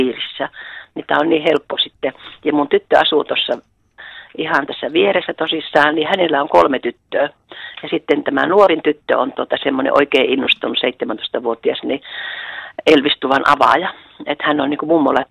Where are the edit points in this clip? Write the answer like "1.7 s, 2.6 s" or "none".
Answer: none